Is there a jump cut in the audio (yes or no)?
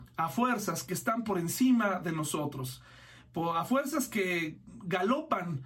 no